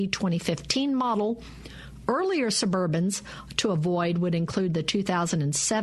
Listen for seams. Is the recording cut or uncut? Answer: uncut